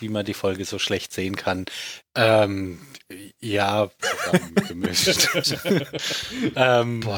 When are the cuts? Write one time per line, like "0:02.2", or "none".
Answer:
0:02.0
0:04.0